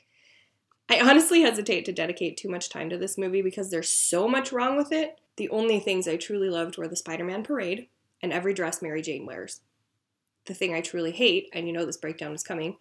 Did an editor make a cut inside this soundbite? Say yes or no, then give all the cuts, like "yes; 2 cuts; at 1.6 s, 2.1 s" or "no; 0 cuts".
yes; 1 cut; at 5.3 s